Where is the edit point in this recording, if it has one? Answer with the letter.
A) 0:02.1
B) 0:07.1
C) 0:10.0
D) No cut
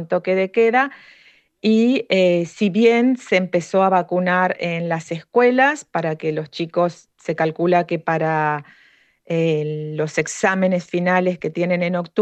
B